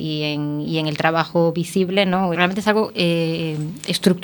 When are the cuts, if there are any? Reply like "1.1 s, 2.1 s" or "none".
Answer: 2.3 s